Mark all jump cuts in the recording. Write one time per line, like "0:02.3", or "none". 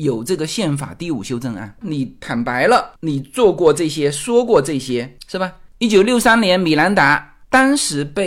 0:01.8
0:05.7

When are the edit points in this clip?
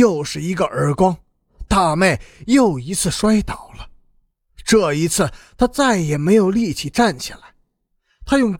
none

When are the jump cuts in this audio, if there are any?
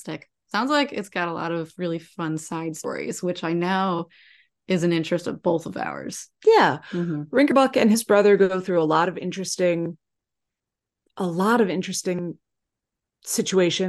none

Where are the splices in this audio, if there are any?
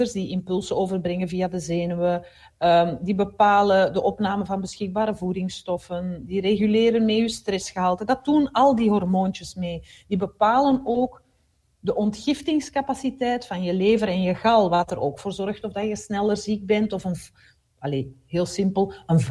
none

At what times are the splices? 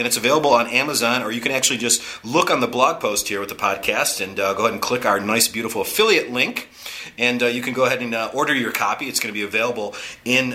none

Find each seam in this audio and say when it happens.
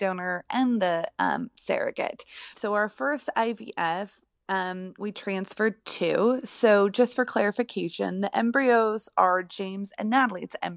0:02.5

